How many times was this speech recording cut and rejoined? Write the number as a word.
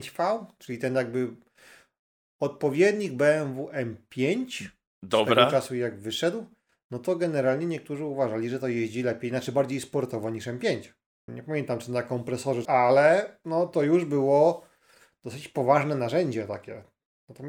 two